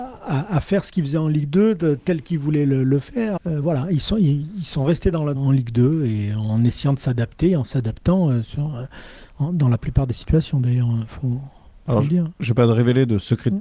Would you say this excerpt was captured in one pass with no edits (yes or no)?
no